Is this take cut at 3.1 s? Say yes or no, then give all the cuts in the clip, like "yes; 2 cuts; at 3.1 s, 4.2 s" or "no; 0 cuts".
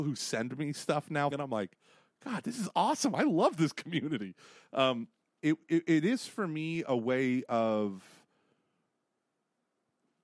no; 2 cuts; at 1.3 s, 5.4 s